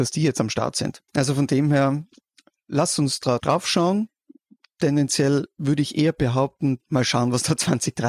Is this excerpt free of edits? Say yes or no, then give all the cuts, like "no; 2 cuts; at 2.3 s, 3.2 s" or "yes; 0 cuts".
no; 3 cuts; at 1.1 s, 3.4 s, 6.8 s